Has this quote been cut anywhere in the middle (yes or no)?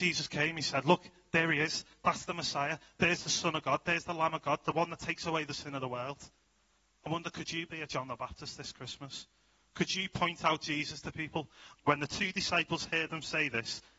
yes